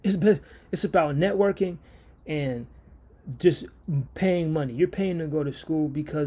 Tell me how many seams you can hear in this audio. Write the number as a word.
one